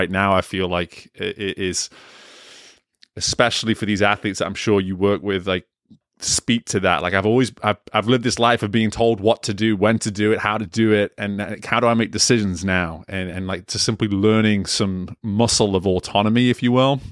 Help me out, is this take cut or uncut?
uncut